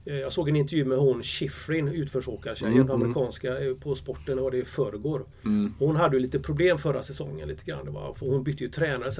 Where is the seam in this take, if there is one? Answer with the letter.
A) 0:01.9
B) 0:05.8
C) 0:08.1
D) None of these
D